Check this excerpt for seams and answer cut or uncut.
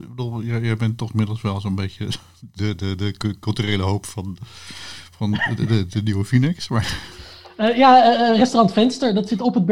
uncut